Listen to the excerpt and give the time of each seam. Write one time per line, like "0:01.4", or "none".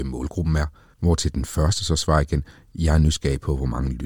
0:00.9